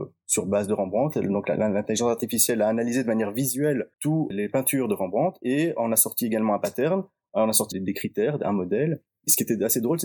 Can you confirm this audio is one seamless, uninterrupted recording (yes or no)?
no